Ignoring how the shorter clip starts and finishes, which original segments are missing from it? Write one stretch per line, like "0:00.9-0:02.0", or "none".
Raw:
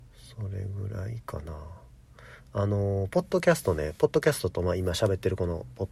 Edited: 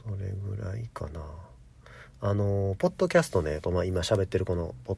0:04.0-0:04.5